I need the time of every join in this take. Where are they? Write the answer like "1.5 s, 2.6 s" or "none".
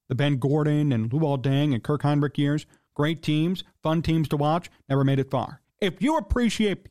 5.6 s